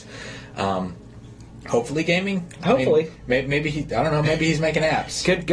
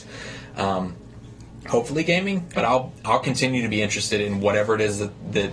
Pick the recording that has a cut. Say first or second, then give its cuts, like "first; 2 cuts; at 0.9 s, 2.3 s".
second; 1 cut; at 2.5 s